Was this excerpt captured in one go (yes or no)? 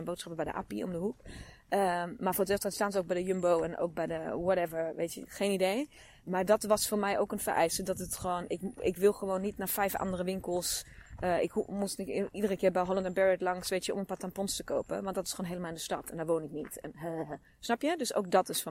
yes